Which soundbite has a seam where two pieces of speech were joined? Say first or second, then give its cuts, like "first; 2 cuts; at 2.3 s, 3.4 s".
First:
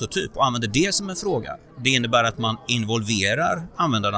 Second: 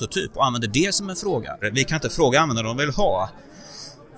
second; 1 cut; at 1.6 s